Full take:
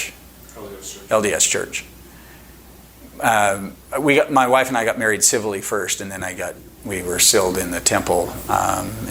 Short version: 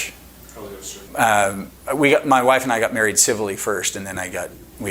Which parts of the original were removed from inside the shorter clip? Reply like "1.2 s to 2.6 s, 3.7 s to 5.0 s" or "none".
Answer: 1.1 s to 3.1 s